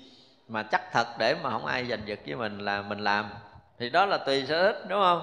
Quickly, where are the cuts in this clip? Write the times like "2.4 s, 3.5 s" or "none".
3.7 s